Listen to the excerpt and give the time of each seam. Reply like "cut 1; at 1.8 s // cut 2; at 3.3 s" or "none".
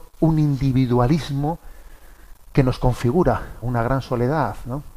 cut 1; at 2.4 s // cut 2; at 3.6 s